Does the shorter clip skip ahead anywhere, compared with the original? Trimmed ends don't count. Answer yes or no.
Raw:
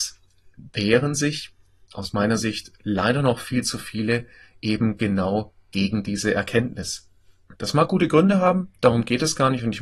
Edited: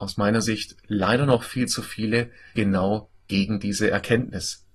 yes